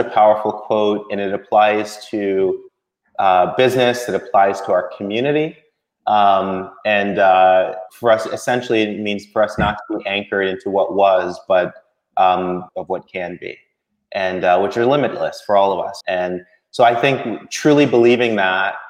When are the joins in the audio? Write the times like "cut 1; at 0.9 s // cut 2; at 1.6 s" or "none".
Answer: cut 1; at 7.9 s // cut 2; at 12.7 s // cut 3; at 16.0 s

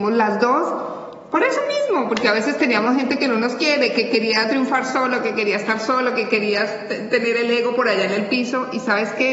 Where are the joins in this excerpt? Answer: none

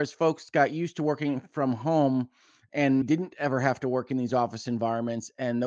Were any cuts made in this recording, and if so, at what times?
cut 1; at 3.0 s

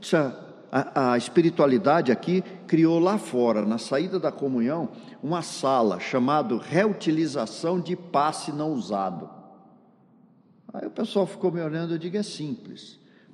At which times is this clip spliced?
none

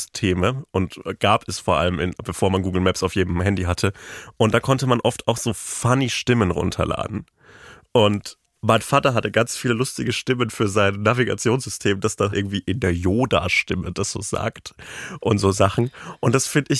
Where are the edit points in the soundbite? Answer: cut 1; at 8.4 s // cut 2; at 12.3 s

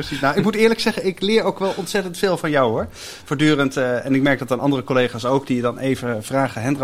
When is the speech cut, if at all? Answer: none

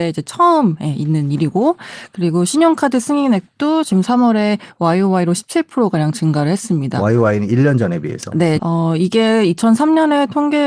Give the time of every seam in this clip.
cut 1; at 8.6 s

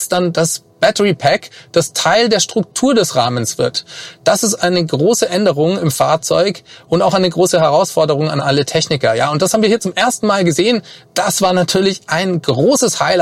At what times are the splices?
none

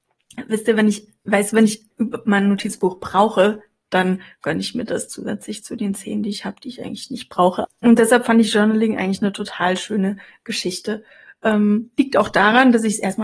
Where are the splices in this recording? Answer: cut 1; at 7.6 s

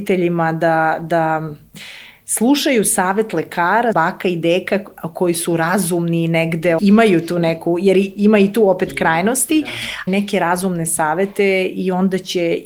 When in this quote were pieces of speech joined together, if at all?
cut 1; at 3.9 s // cut 2; at 6.8 s // cut 3; at 10.1 s

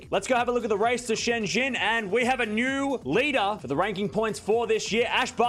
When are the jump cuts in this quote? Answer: none

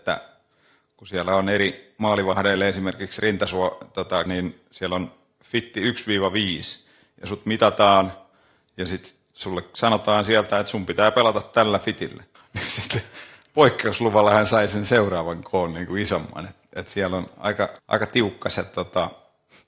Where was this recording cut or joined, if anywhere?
cut 1; at 4.3 s // cut 2; at 12.4 s // cut 3; at 17.8 s

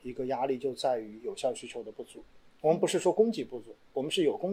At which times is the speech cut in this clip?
none

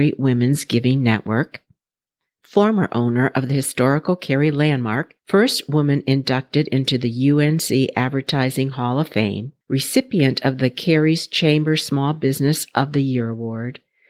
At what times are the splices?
cut 1; at 2.4 s // cut 2; at 5.2 s // cut 3; at 9.6 s

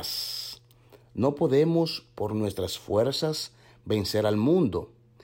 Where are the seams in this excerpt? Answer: none

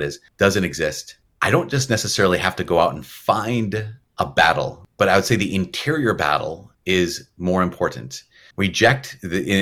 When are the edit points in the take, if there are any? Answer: cut 1; at 8.5 s

